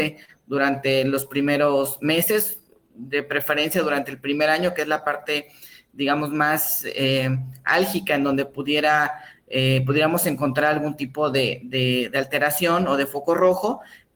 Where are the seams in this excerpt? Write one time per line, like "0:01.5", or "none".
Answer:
none